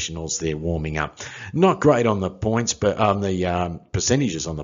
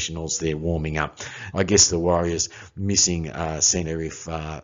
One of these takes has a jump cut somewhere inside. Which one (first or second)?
second